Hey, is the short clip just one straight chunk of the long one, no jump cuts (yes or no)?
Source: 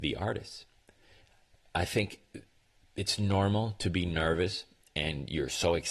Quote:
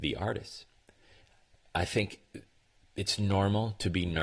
yes